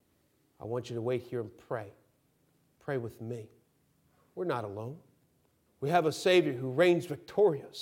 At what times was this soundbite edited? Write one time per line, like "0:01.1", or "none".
0:05.6